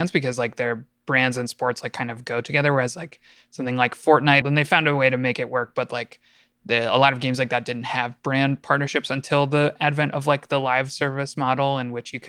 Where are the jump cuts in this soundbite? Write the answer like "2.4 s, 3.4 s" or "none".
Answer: 4.4 s